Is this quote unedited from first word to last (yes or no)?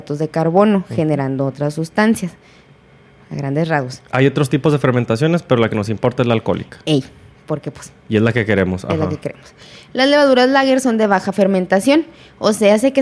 yes